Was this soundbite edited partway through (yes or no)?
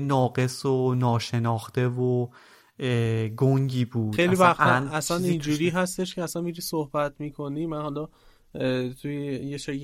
yes